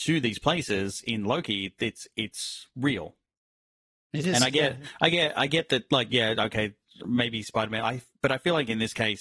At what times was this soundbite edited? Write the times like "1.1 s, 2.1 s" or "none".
none